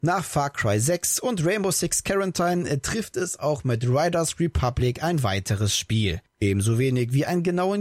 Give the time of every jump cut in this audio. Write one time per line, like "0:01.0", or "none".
0:06.3